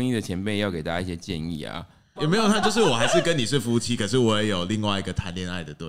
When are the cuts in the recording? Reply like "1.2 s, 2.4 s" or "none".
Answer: 2.2 s